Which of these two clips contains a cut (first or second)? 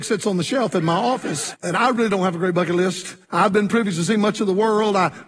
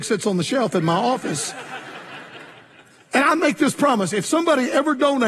first